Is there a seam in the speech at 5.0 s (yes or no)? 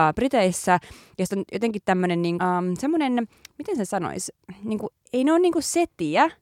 no